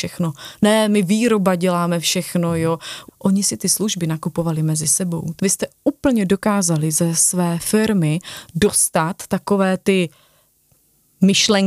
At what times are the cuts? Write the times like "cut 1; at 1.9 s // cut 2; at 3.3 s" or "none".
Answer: cut 1; at 3.1 s // cut 2; at 5.4 s